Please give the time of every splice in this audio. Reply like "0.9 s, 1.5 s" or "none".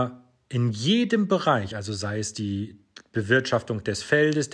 none

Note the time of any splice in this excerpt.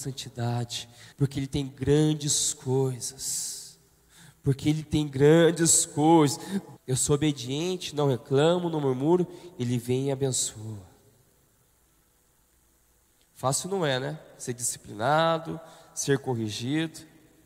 1.1 s, 6.8 s

